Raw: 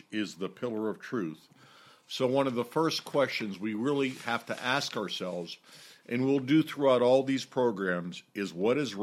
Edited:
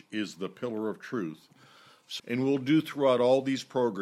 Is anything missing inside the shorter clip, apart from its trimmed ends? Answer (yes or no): yes